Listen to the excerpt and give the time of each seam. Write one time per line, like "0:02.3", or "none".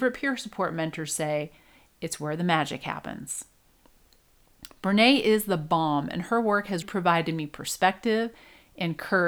0:06.8